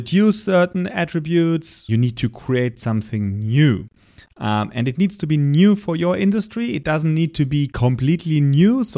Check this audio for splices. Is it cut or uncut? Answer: cut